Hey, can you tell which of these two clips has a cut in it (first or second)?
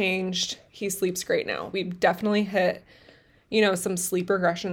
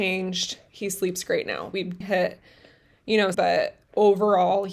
second